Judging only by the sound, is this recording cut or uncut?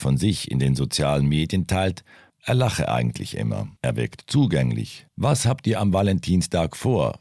cut